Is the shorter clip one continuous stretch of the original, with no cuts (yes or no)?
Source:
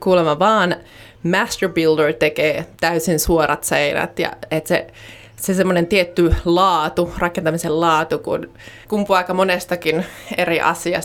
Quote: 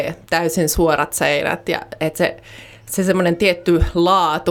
yes